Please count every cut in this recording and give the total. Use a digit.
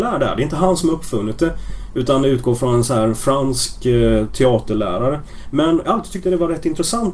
0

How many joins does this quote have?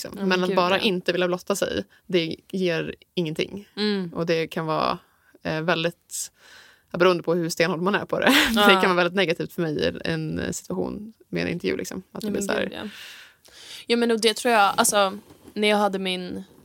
0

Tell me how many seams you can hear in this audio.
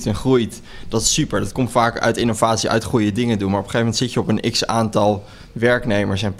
0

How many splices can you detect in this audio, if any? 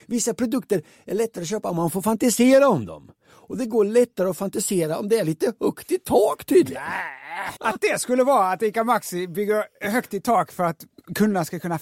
1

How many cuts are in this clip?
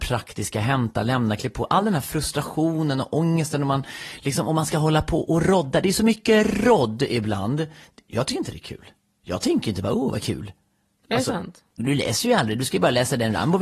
1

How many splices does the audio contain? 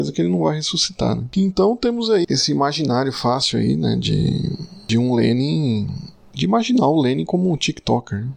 1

